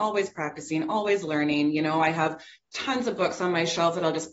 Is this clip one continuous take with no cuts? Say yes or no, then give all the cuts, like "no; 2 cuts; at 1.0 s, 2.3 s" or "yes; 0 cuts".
yes; 0 cuts